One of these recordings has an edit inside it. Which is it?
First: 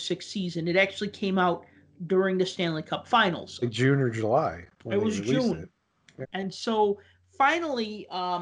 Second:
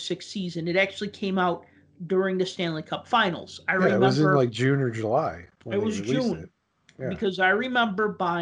first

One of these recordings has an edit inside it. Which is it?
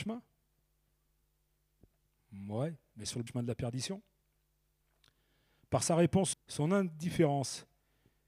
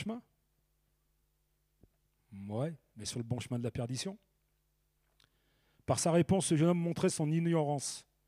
first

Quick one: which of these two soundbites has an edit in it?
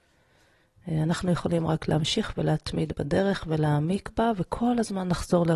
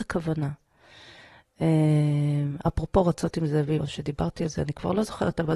second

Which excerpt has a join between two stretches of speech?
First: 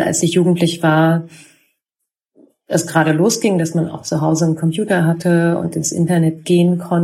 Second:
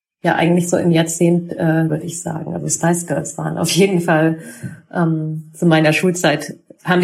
second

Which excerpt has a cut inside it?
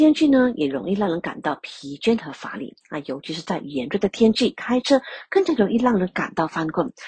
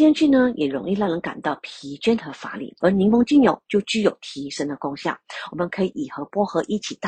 second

